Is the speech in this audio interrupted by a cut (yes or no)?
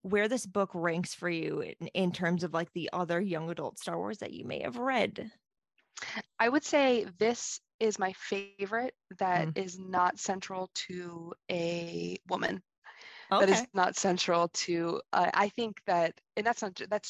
no